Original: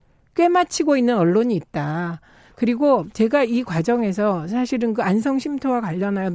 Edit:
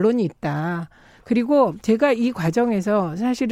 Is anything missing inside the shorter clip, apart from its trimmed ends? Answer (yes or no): no